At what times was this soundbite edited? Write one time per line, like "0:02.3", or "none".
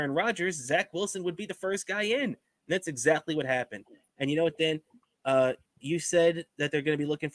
none